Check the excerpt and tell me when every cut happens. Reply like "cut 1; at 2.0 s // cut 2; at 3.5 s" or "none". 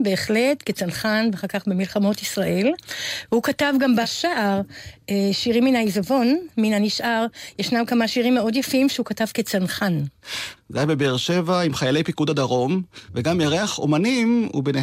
cut 1; at 10.6 s // cut 2; at 13.1 s